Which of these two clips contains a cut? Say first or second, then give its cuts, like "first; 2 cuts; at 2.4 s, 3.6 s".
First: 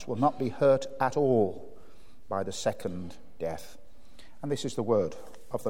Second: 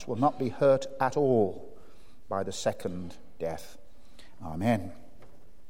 second; 1 cut; at 4.3 s